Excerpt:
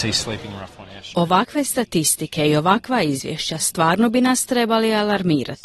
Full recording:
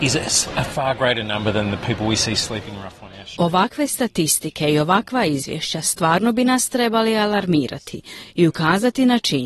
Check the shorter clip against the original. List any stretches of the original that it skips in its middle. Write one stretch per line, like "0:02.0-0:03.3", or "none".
none